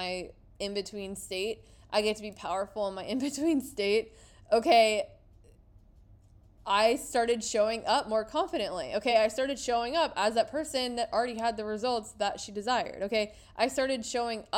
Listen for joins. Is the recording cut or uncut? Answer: uncut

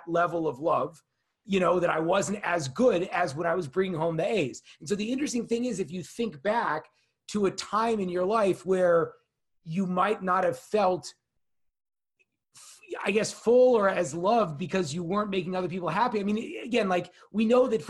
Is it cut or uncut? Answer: uncut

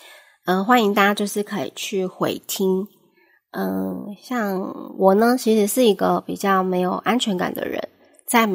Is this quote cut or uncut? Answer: uncut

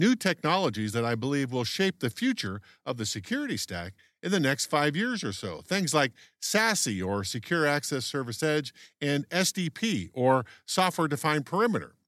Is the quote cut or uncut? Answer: uncut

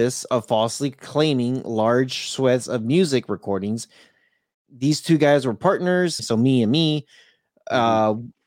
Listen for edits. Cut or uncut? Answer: cut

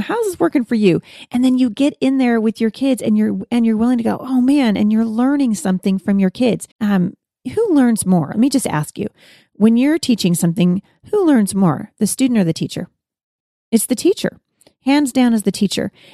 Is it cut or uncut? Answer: cut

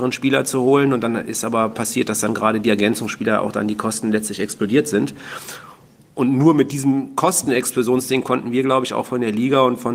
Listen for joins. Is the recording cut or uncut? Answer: uncut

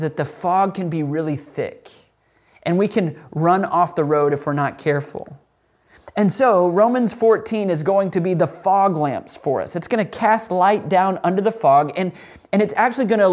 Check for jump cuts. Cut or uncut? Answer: uncut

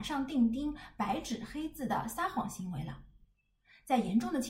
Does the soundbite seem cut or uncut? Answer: uncut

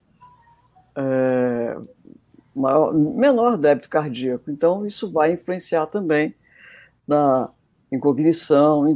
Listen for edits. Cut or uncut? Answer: uncut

